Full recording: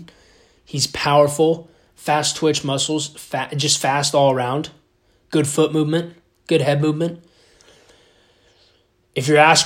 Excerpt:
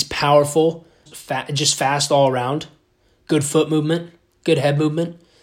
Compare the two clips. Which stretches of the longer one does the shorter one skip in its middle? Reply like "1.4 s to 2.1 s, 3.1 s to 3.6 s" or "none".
1.9 s to 3.1 s

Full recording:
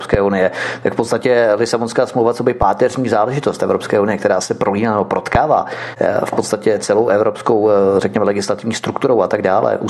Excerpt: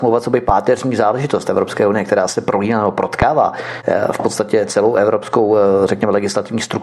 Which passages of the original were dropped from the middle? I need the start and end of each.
none

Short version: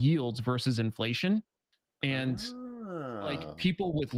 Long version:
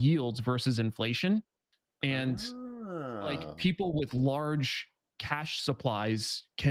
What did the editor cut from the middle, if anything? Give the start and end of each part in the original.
none

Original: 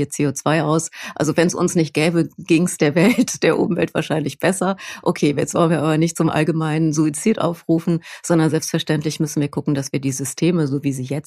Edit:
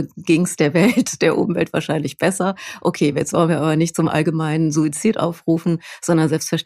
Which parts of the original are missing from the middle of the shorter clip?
none

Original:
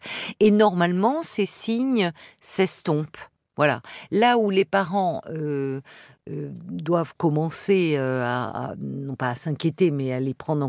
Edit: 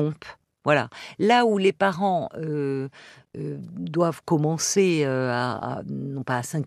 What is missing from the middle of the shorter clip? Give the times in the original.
none

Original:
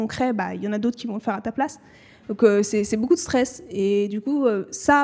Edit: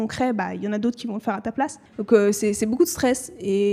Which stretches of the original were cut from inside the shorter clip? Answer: 1.9 s to 2.2 s

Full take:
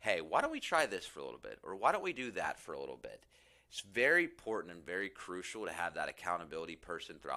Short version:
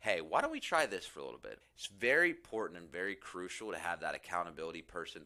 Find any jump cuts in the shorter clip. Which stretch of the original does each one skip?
1.6 s to 3.5 s

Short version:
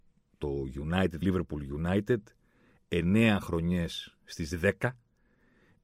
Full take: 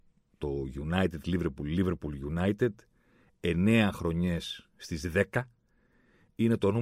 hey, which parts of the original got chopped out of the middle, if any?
1.2 s to 1.7 s

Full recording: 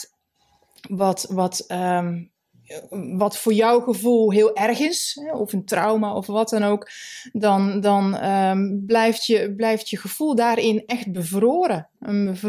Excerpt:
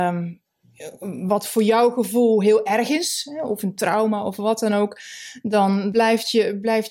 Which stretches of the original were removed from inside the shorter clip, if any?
7.8 s to 8.9 s

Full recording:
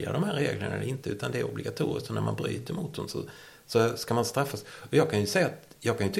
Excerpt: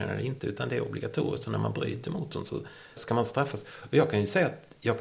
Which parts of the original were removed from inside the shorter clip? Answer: 3.6 s to 4.0 s

